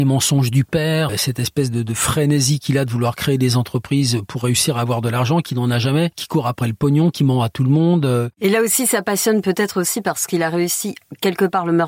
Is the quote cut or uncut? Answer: cut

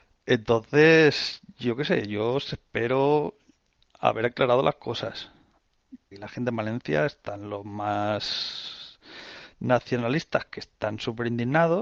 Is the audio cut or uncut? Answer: cut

